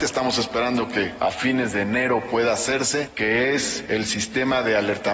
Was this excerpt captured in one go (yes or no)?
yes